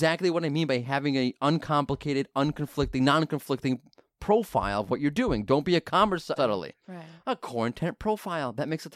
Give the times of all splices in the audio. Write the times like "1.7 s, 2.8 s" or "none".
6.4 s